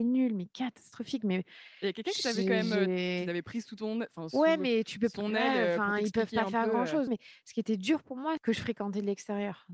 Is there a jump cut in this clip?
yes; 2 cuts; at 7.1 s, 8.4 s

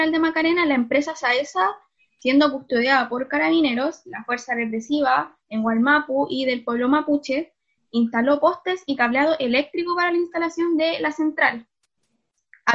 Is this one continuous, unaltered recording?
yes; 0 cuts

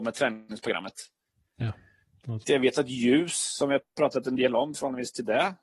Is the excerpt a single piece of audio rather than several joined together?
no; 1 cut; at 2.4 s

